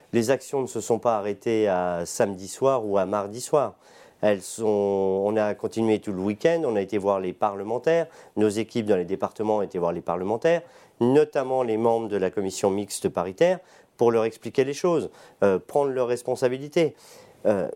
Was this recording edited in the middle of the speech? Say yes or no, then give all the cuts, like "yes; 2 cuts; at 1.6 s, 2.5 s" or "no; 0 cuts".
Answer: no; 0 cuts